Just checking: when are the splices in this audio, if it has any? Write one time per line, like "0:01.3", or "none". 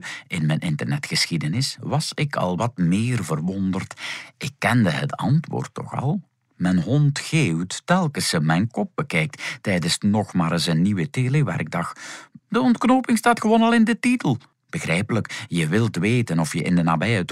0:12.4
0:14.5